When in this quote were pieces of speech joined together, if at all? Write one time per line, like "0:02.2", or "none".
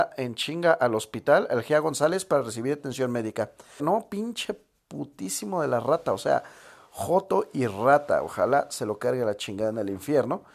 0:03.8